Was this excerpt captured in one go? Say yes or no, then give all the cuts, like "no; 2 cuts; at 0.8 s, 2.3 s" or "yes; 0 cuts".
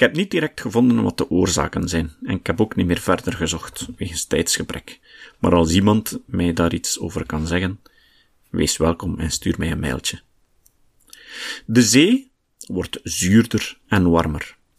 yes; 0 cuts